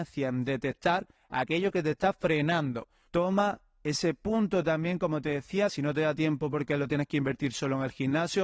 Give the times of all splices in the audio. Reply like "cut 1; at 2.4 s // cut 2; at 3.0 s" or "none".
cut 1; at 3.1 s // cut 2; at 5.7 s